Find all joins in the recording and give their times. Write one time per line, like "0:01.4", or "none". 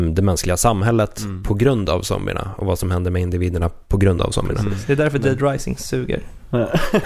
none